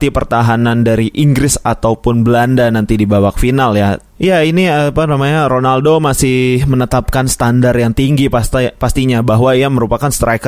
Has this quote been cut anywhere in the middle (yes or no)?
yes